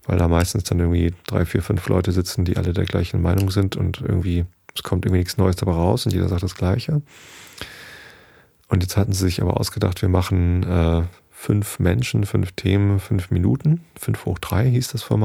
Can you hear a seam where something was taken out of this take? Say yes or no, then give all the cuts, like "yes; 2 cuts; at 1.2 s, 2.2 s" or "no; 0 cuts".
no; 0 cuts